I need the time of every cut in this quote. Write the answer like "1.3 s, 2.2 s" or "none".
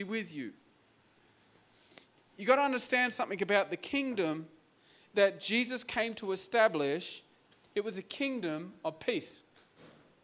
none

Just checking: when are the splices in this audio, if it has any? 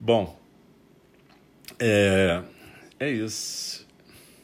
none

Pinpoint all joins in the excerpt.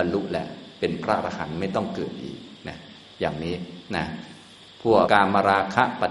5.1 s

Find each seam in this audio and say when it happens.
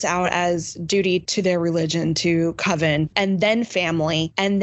3.1 s

